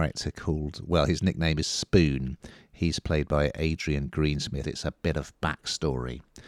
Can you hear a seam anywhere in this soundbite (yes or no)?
yes